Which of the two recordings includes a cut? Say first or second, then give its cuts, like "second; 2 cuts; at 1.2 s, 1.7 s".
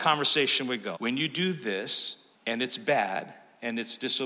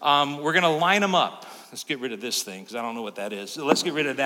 first; 2 cuts; at 1.0 s, 2.3 s